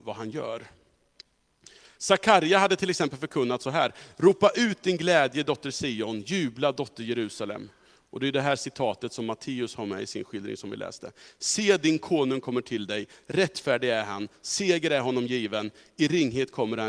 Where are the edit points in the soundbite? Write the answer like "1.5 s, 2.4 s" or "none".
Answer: 2.0 s